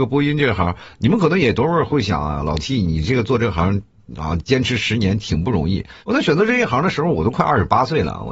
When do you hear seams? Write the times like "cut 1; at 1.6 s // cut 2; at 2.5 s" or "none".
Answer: cut 1; at 6.0 s